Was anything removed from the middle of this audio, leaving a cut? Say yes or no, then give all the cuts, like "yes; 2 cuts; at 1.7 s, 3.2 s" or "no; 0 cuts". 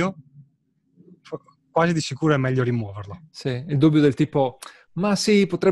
no; 0 cuts